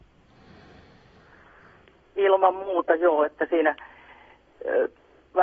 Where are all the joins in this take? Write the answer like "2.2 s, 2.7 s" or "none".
none